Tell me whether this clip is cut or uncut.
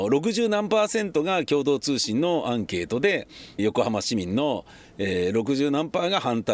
cut